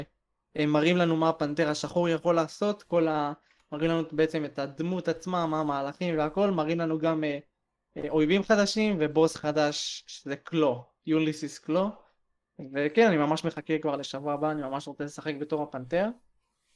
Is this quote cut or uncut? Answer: uncut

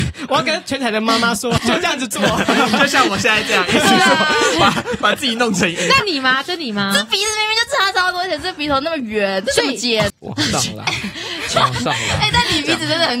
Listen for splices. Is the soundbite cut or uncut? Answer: cut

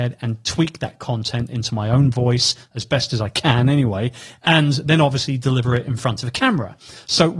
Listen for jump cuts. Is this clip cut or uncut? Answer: uncut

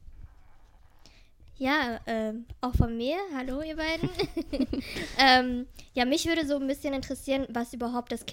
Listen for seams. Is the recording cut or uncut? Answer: uncut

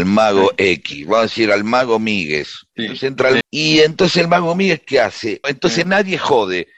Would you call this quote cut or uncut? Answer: cut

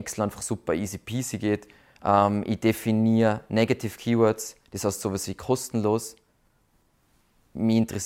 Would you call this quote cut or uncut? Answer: uncut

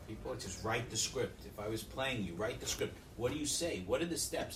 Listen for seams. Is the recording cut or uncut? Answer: uncut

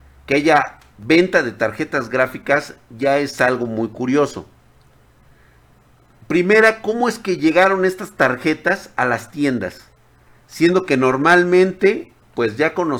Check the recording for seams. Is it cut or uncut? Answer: uncut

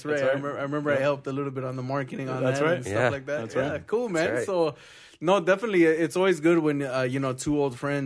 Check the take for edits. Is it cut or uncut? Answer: uncut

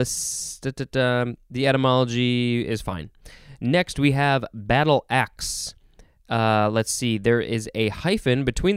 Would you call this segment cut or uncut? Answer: uncut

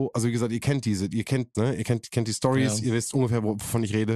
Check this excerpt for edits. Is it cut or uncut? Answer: cut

